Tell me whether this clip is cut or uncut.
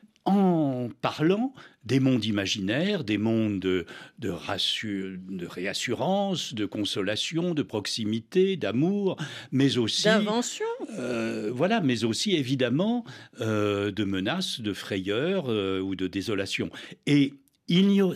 uncut